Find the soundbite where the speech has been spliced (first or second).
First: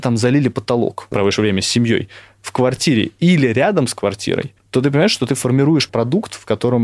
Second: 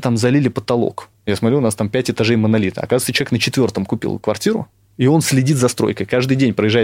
first